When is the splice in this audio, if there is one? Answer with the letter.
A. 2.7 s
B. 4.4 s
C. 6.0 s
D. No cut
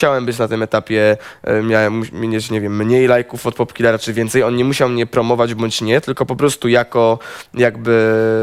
D